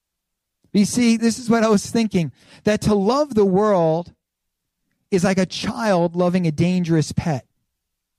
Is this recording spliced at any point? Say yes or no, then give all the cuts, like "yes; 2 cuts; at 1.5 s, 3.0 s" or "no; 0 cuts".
yes; 1 cut; at 1.2 s